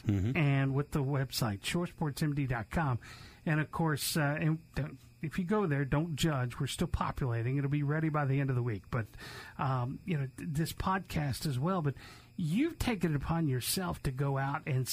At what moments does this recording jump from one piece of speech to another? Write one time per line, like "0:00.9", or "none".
none